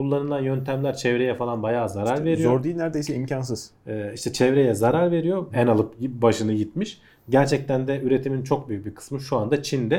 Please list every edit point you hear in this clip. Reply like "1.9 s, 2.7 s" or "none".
5.5 s